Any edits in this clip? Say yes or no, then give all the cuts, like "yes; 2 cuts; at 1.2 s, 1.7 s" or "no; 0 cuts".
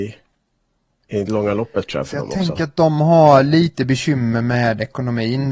no; 0 cuts